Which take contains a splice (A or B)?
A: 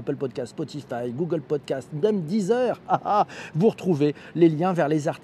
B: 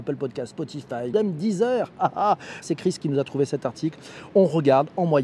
B